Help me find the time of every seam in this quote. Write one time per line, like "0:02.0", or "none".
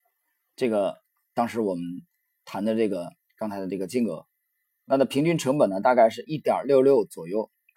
none